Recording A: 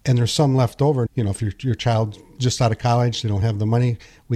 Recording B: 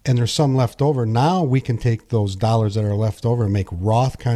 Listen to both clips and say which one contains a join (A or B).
A